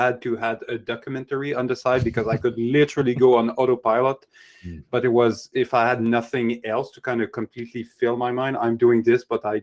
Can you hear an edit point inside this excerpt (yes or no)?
no